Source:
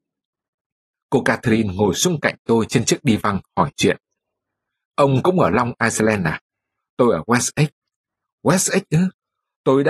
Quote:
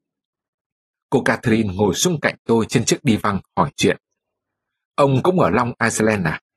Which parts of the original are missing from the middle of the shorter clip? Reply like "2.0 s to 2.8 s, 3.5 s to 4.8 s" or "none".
none